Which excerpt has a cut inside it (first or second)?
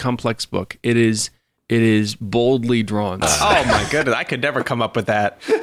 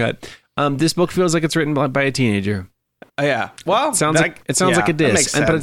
first